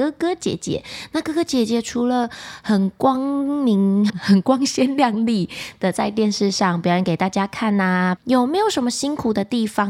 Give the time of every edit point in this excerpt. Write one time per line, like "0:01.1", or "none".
0:04.1
0:08.2